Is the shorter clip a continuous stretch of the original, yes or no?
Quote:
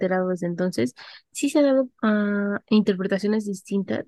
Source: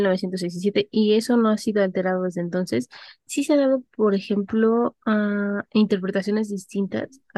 no